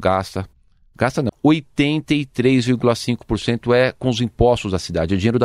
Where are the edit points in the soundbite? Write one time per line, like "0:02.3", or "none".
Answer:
0:01.3